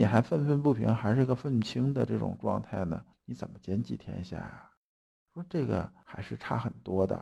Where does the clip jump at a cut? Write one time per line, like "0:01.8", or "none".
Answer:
none